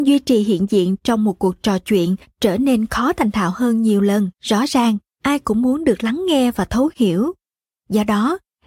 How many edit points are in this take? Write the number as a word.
one